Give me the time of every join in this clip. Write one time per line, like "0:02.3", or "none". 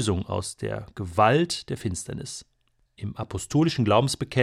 0:02.9